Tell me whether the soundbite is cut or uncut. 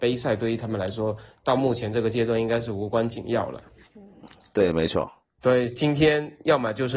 uncut